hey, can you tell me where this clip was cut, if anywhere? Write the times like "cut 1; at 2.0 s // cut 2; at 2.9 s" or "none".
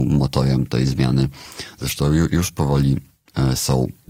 cut 1; at 2.3 s